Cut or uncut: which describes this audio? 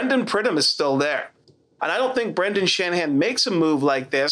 cut